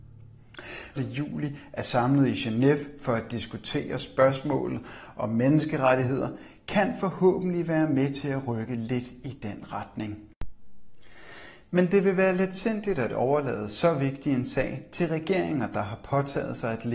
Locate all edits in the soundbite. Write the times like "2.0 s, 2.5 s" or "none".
1.0 s